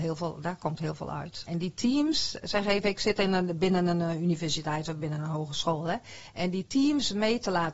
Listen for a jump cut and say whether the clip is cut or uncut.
cut